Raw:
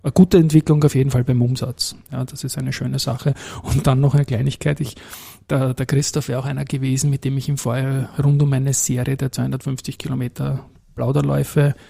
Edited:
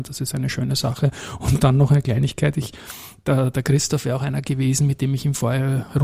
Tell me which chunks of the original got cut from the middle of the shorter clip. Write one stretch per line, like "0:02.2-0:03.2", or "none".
none